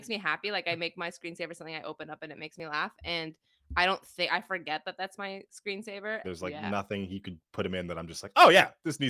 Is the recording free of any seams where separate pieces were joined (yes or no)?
no